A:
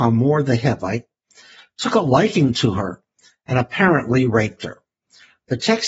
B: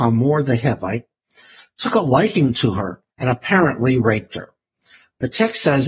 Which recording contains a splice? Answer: B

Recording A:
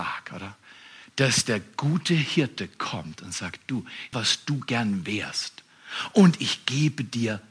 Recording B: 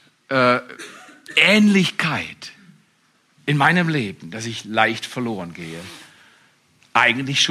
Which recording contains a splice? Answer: A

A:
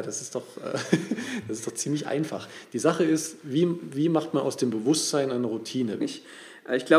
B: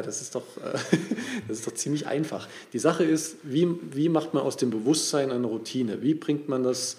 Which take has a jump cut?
A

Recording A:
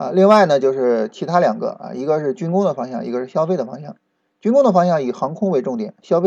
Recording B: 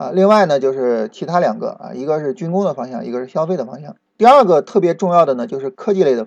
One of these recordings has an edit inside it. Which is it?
B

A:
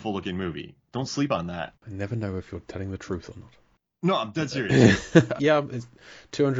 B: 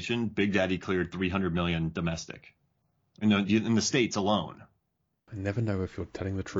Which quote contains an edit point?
A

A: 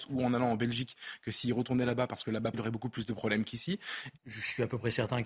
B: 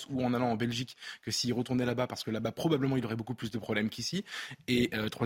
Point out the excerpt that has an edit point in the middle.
A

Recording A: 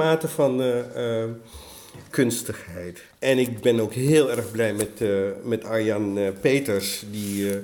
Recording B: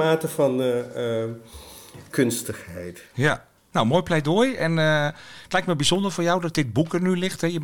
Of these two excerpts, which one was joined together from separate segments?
A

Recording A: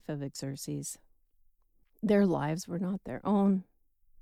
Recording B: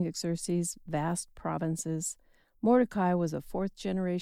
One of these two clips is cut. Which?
A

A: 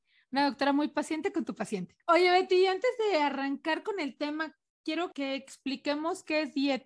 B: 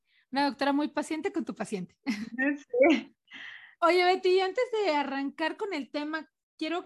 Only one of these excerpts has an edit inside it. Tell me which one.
A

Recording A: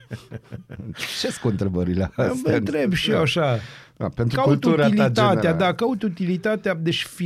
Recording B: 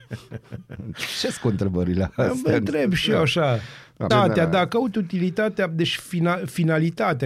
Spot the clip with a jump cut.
B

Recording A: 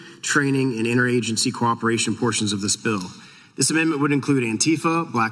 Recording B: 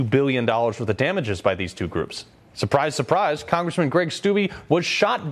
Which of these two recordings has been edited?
B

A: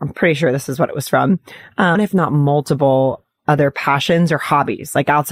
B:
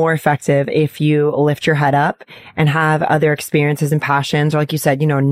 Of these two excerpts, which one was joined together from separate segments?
A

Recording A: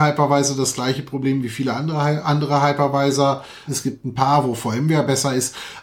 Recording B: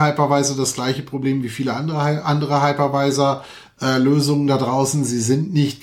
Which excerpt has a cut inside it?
A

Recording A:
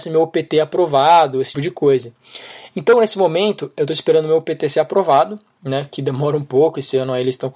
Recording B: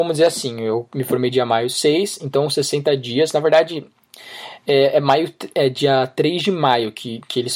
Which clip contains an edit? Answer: A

